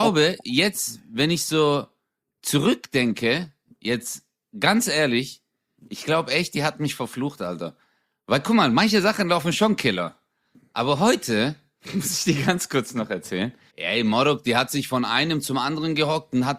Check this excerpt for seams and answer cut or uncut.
cut